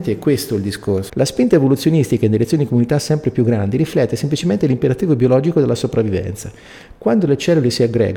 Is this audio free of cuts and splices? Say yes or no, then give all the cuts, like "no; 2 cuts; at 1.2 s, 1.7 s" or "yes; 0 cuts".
no; 2 cuts; at 1.1 s, 6.9 s